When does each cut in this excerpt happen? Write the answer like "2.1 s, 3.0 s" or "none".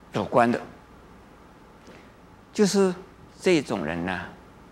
3.3 s